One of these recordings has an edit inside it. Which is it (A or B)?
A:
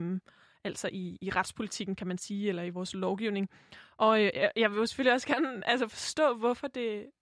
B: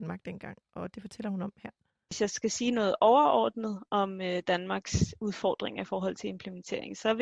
B